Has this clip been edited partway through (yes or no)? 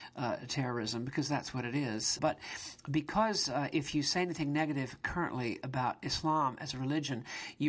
yes